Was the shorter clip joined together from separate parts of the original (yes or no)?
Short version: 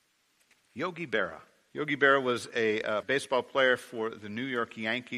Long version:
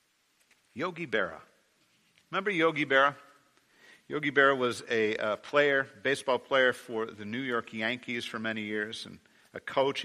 yes